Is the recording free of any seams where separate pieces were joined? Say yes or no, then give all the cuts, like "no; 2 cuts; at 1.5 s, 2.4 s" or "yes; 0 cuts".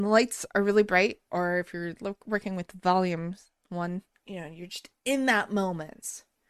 no; 1 cut; at 4.1 s